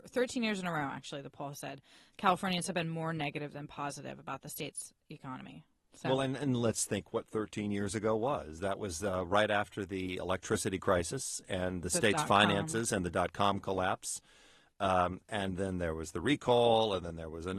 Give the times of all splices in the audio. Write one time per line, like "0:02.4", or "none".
none